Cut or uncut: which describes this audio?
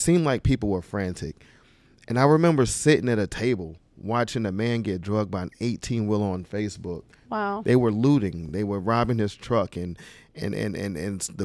uncut